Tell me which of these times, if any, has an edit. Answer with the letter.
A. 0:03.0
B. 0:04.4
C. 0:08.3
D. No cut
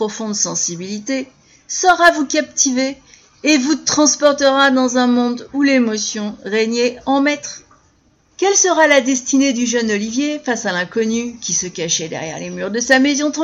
C